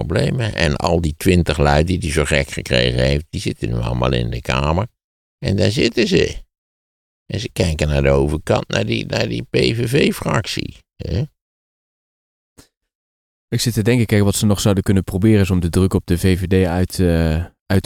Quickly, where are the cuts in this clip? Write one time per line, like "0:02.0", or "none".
none